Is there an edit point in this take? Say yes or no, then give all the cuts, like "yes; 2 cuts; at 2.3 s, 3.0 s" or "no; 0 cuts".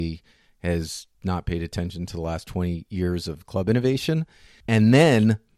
yes; 1 cut; at 1.1 s